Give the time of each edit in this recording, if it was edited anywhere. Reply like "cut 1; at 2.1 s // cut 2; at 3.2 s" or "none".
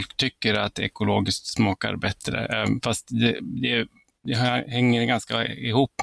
none